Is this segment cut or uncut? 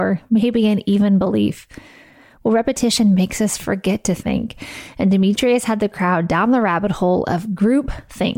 uncut